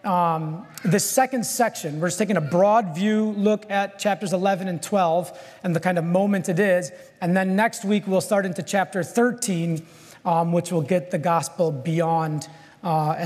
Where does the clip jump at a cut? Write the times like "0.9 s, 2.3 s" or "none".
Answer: none